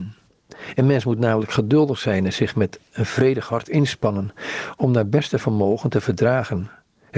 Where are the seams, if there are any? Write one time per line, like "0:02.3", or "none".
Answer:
none